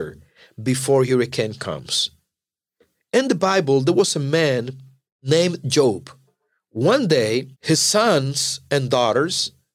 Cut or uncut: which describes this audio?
cut